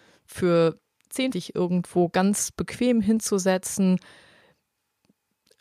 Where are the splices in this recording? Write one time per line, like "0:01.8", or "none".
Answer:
0:01.3